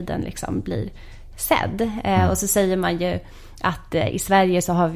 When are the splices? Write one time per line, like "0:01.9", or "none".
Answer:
none